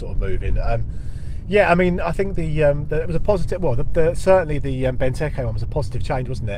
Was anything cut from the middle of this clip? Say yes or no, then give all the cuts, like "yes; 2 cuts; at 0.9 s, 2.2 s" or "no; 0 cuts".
no; 0 cuts